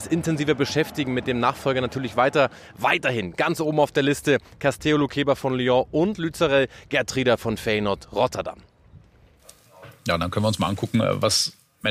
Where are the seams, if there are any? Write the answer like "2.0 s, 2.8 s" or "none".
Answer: none